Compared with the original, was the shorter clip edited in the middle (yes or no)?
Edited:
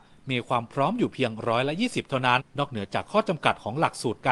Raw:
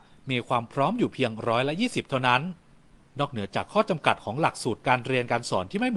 yes